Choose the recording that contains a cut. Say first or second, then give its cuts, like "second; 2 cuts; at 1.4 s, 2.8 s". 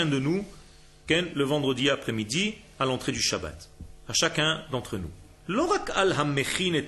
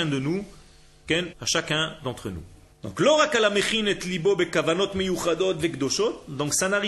second; 2 cuts; at 1.3 s, 2.7 s